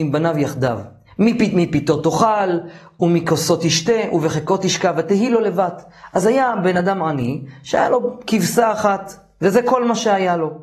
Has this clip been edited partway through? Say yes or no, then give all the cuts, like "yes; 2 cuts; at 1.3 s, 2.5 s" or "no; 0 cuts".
no; 0 cuts